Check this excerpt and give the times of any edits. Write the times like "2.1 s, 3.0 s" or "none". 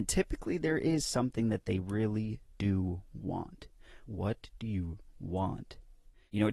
4.1 s, 5.1 s